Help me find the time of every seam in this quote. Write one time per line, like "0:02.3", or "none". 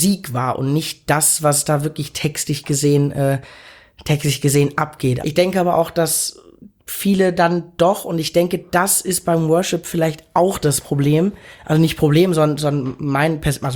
0:05.2